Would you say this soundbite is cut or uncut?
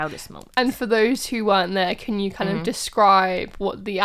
uncut